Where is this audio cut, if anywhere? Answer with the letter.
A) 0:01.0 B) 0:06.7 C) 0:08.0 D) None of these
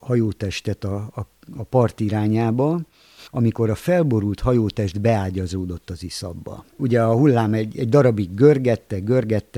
B